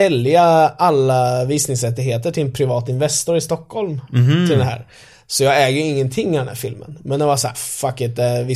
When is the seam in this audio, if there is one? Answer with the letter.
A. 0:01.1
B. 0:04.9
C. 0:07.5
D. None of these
C